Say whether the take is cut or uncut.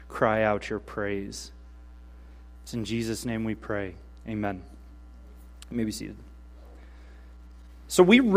cut